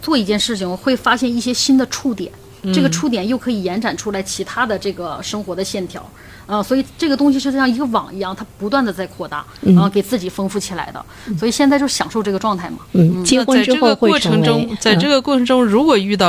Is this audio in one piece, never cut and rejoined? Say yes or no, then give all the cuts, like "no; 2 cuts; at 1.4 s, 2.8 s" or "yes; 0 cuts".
yes; 0 cuts